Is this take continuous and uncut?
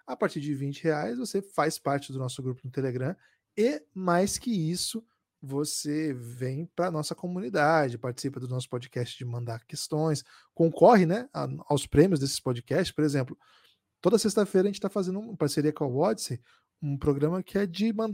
yes; 0 cuts

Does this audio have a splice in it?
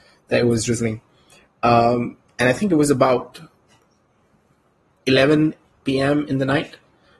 no; 0 cuts

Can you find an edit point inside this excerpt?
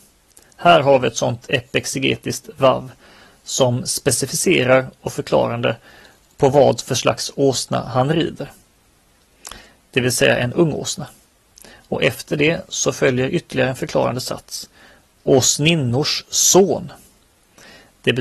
no; 0 cuts

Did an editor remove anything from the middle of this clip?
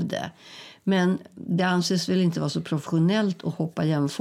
no; 0 cuts

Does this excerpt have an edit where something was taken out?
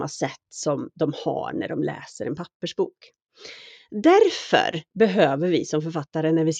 no; 0 cuts

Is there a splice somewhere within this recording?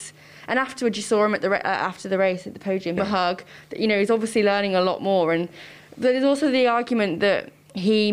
yes; 1 cut; at 3.0 s

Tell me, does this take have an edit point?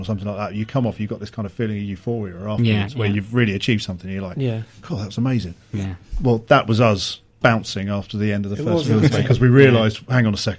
yes; 2 cuts; at 7.3 s, 9.1 s

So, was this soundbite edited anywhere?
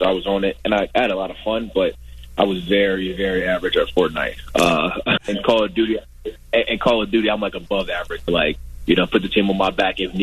yes; 2 cuts; at 5.2 s, 8.3 s

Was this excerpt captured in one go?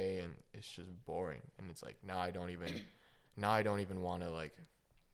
yes; 0 cuts

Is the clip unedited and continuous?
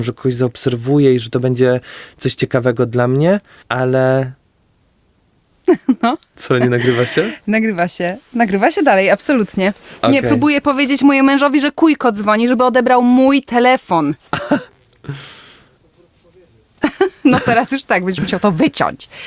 no; 1 cut; at 3.6 s

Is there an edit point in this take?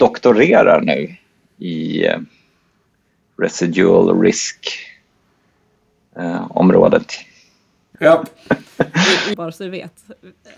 yes; 2 cuts; at 7.9 s, 9.3 s

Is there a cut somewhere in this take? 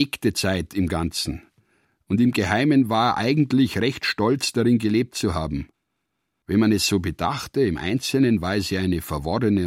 no; 0 cuts

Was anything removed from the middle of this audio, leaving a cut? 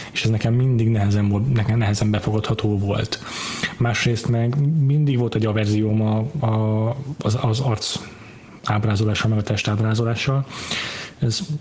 no; 0 cuts

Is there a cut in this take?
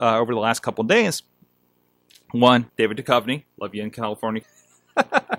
yes; 2 cuts; at 2.7 s, 4.4 s

